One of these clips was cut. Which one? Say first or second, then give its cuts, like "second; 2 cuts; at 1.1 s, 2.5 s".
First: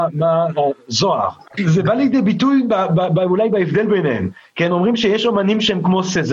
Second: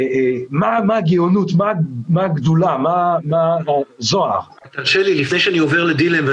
first; 1 cut; at 1.6 s